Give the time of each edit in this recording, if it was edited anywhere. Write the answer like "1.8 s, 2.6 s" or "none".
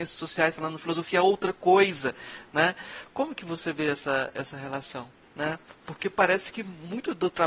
5.2 s